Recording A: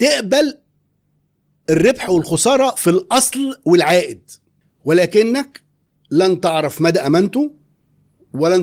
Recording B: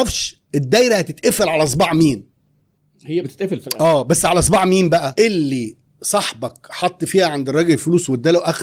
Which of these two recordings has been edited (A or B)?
B